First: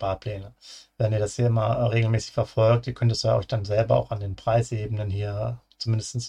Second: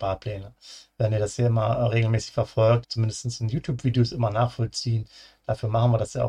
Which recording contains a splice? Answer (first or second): second